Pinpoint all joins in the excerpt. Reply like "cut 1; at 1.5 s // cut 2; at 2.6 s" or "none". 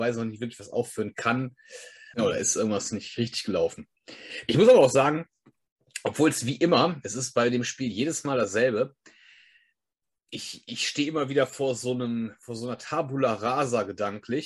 cut 1; at 2.1 s